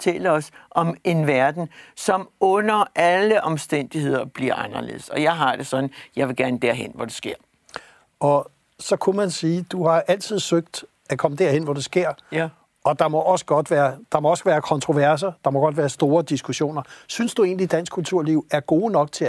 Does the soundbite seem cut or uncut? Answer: uncut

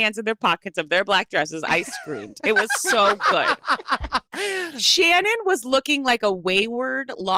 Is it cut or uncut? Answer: uncut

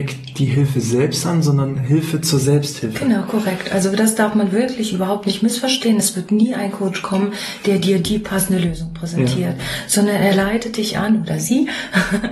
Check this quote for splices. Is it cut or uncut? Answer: uncut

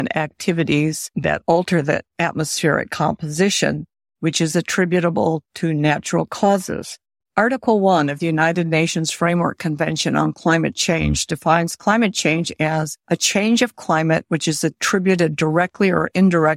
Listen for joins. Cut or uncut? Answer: cut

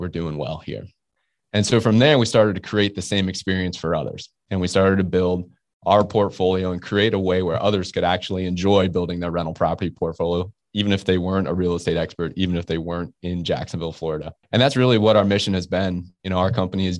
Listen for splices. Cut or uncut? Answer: cut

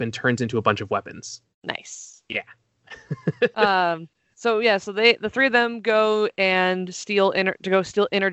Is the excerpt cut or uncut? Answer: uncut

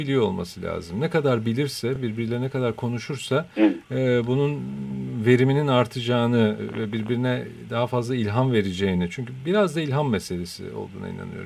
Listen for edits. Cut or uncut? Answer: uncut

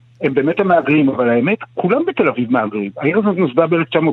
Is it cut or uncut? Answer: uncut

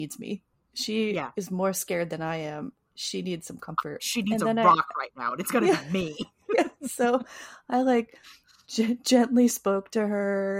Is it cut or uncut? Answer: uncut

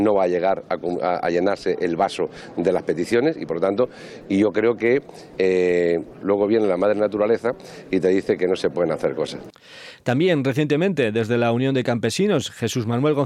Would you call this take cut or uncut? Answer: cut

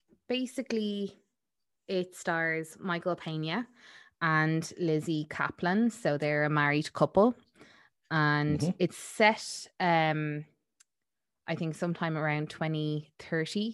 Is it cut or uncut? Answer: uncut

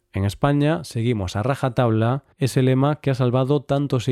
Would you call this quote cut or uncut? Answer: cut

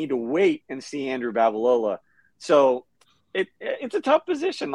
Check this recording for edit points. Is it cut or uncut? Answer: uncut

